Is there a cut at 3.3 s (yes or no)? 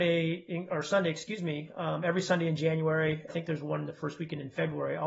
yes